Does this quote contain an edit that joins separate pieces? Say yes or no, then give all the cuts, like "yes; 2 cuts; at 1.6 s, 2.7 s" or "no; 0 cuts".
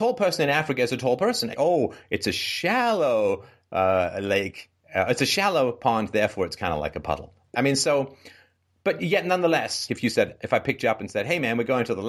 yes; 3 cuts; at 1.5 s, 7.5 s, 9.9 s